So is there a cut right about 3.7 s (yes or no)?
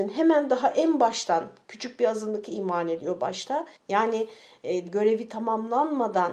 yes